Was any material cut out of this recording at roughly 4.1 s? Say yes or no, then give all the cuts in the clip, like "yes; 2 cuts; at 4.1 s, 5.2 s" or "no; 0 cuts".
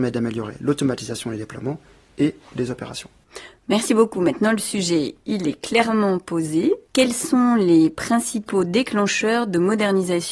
no; 1 cut; at 6.9 s